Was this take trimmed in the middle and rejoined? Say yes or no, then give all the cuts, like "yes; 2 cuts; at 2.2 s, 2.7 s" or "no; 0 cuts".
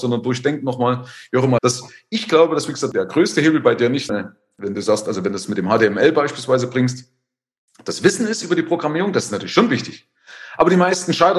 yes; 2 cuts; at 1.6 s, 4.1 s